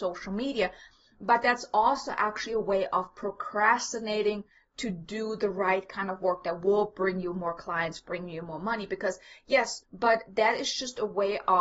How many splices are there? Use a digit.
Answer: 1